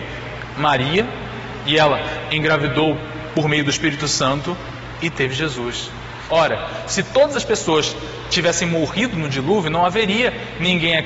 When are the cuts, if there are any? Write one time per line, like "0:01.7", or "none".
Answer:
0:06.3